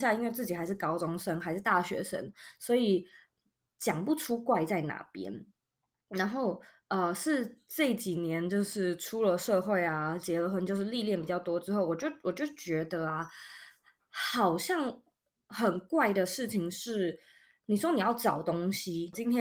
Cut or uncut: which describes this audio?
uncut